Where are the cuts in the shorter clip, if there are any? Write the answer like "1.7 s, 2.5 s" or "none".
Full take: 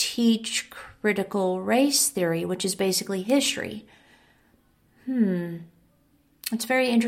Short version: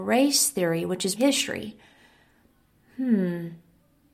1.1 s